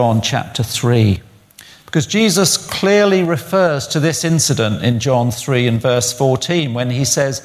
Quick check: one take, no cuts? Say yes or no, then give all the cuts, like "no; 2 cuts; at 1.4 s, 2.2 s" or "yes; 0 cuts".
yes; 0 cuts